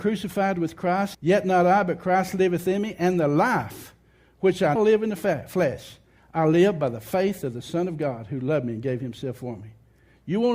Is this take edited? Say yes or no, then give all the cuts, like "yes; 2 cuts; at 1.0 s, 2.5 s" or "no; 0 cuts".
yes; 2 cuts; at 1.1 s, 4.8 s